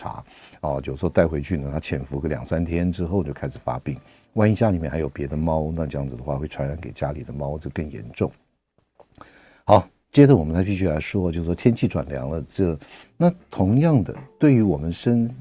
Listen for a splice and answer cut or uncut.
cut